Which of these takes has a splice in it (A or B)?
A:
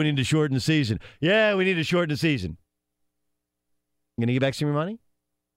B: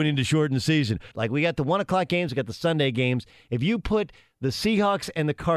B